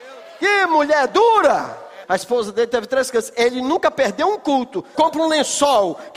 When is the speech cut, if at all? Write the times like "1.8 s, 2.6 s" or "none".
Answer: 2.0 s, 4.9 s